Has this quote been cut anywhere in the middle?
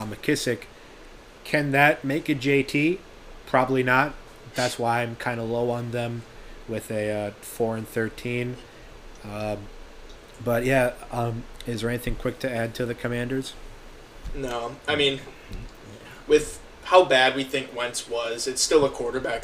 no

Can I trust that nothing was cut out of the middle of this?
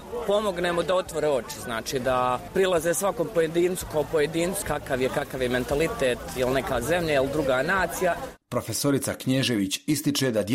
no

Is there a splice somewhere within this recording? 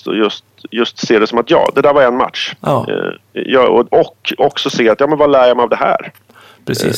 no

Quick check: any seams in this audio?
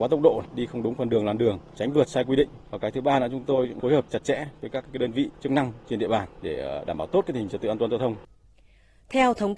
yes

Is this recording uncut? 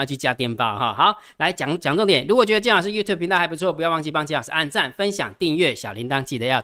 yes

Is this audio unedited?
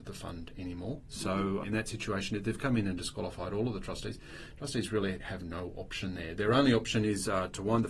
no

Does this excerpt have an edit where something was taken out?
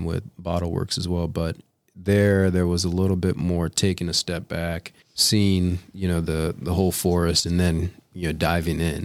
yes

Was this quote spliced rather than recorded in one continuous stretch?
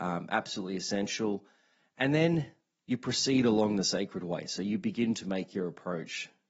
no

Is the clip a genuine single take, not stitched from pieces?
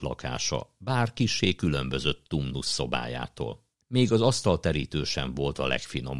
no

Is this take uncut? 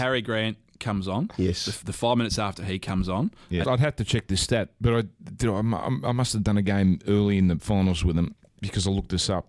no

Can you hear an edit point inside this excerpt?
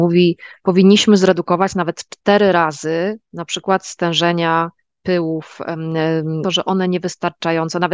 yes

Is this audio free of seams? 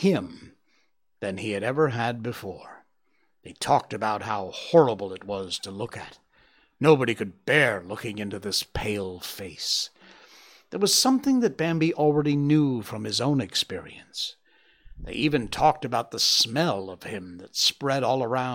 yes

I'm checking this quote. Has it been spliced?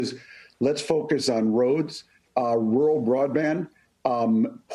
no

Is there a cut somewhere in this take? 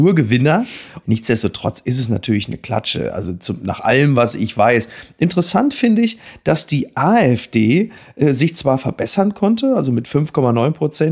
yes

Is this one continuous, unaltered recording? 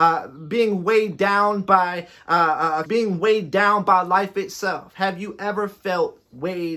no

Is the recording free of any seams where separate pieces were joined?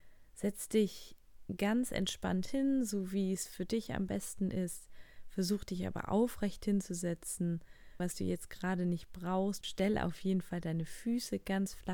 no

